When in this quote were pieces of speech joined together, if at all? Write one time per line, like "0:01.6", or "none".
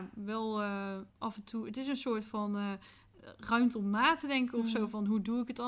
0:01.1

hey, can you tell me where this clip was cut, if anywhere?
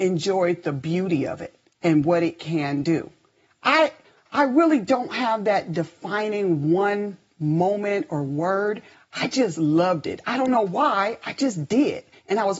none

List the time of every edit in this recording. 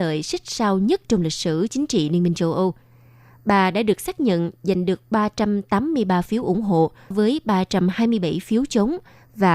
0:07.1

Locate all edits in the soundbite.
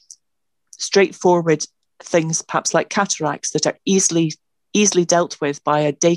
none

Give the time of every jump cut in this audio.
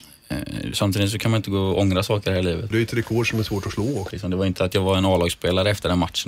0:02.7
0:04.1

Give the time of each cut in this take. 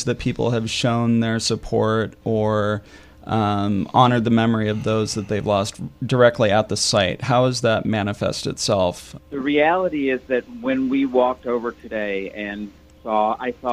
0:09.2

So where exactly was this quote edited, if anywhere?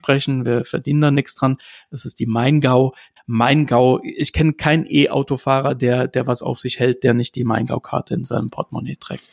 0:03.2

